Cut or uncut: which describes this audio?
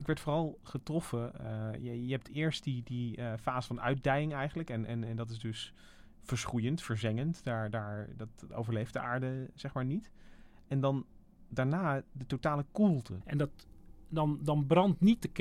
cut